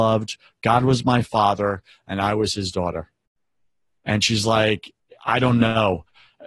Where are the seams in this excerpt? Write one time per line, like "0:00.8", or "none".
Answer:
none